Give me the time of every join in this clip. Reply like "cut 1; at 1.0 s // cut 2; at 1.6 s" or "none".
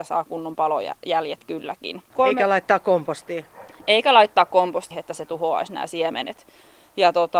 cut 1; at 2.1 s // cut 2; at 4.9 s